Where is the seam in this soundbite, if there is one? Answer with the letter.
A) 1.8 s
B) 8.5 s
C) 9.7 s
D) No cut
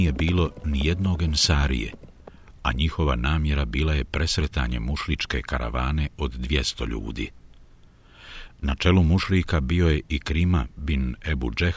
B